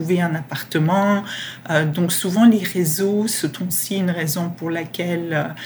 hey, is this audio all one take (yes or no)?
yes